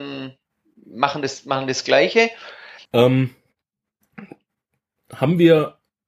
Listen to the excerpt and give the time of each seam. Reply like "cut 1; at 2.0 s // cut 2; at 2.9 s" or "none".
cut 1; at 2.9 s